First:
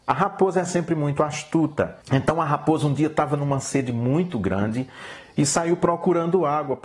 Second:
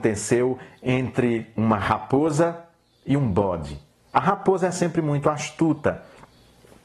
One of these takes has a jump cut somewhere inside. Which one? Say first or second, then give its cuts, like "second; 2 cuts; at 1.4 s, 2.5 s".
first; 1 cut; at 2.0 s